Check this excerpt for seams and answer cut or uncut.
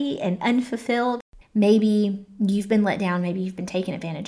cut